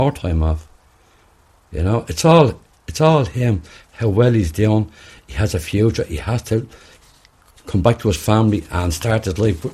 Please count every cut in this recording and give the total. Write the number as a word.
zero